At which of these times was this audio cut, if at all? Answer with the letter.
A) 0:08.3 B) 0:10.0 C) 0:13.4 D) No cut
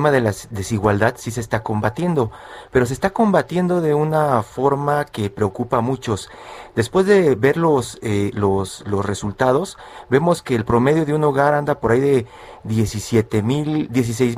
A